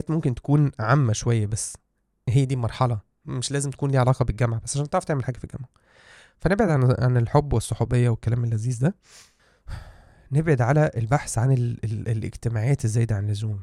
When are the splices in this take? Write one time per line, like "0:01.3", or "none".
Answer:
none